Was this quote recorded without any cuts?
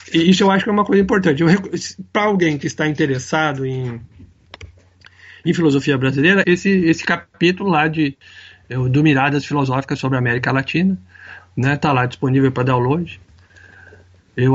no; 1 cut; at 6.4 s

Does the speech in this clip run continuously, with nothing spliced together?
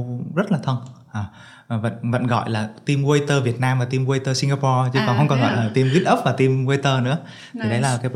yes; 0 cuts

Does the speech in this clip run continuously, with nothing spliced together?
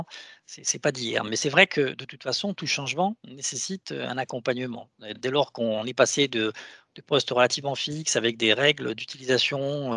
yes; 0 cuts

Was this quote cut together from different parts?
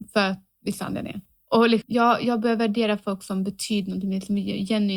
yes; 1 cut; at 1.8 s

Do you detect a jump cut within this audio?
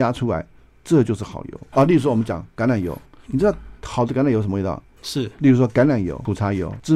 yes; 2 cuts; at 1.7 s, 5.0 s

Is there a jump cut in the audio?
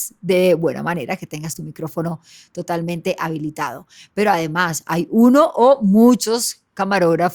no; 0 cuts

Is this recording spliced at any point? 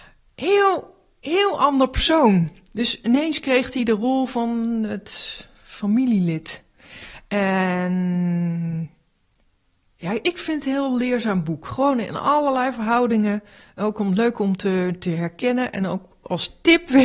no; 0 cuts

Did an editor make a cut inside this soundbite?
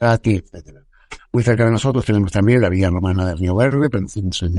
yes; 1 cut; at 1.2 s

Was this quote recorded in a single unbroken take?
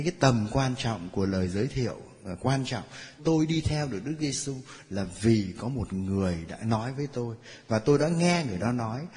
no; 1 cut; at 3.2 s

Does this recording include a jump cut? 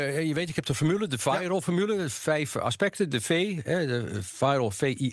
no; 0 cuts

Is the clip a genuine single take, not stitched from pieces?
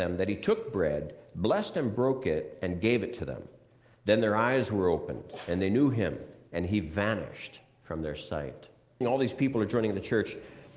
no; 1 cut; at 9.0 s

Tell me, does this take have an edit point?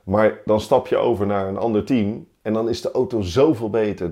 no; 0 cuts

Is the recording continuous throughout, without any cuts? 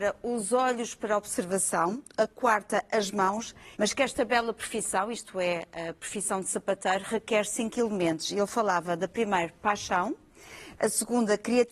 no; 1 cut; at 3.7 s

